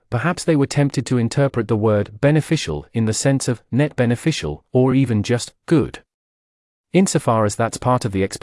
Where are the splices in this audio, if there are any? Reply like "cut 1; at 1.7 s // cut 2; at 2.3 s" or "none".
none